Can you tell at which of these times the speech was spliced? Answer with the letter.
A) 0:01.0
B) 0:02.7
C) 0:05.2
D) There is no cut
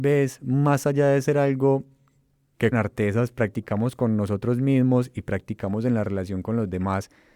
B